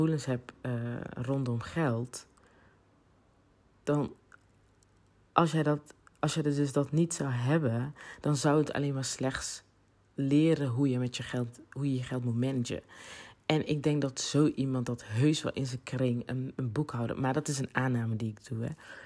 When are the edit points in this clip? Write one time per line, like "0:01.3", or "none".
none